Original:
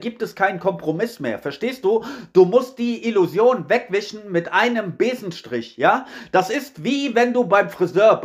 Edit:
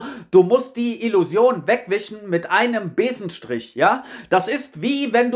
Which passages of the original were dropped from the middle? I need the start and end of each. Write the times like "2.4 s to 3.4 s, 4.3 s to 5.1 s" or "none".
none

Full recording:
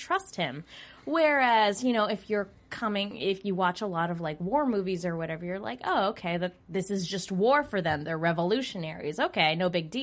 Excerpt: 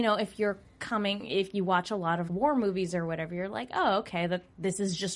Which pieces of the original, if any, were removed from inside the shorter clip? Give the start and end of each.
4.2 s to 4.4 s

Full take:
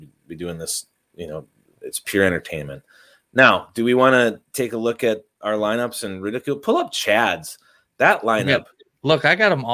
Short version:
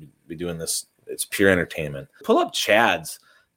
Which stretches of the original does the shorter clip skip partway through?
1.0 s to 1.7 s, 3.0 s to 6.6 s

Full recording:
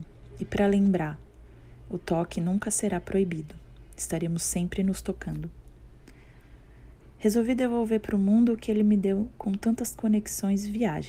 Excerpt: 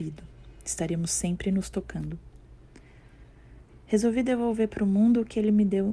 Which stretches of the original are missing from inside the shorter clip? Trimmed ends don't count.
none

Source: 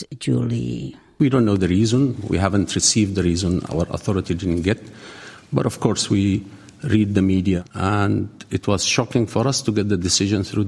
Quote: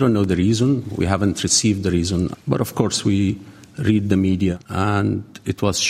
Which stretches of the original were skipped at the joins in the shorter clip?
3.7 s to 5.4 s

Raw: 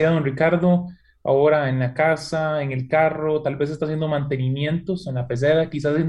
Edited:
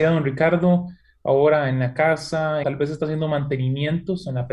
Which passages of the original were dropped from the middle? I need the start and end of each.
2.6 s to 3.4 s

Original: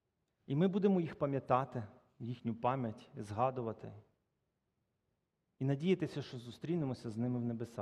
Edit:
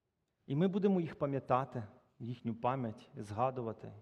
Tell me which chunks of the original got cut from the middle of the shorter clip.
none

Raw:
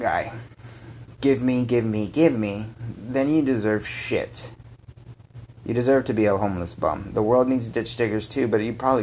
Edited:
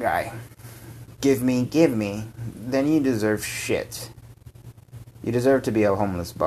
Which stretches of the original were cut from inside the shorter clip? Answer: 1.7 s to 2.1 s

